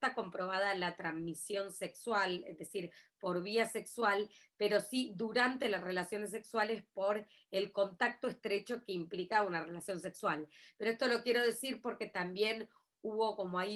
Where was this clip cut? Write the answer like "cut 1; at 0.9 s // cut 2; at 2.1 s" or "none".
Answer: none